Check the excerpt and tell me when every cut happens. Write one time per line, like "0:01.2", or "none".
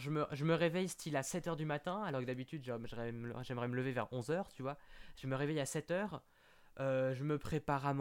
none